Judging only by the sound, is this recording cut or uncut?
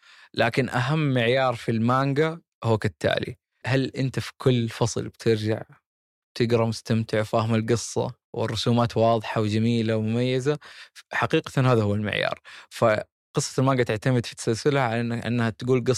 cut